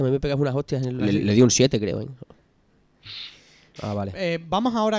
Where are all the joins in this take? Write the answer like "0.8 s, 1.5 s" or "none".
1.0 s, 3.8 s